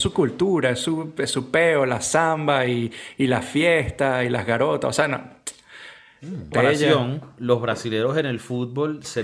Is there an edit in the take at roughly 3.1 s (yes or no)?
no